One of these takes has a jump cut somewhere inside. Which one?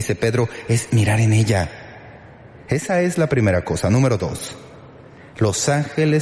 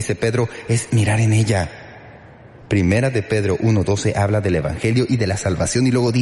first; 1 cut; at 2.6 s

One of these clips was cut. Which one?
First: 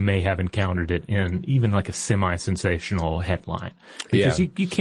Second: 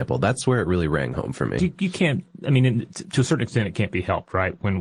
second; 1 cut; at 1.6 s

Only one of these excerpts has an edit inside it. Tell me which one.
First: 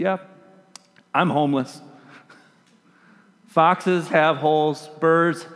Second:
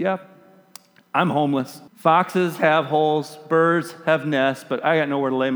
second; 1 cut; at 1.9 s

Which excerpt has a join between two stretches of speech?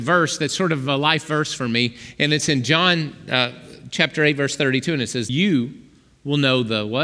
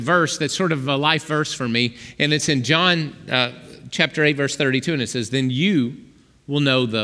first; 1 cut; at 5.3 s

